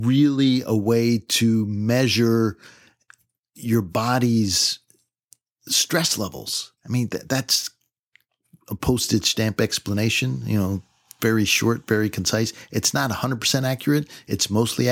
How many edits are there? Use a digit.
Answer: 1